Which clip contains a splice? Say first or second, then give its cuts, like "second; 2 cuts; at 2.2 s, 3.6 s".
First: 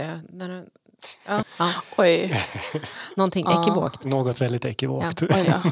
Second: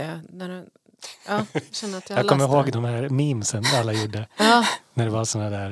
first; 1 cut; at 1.4 s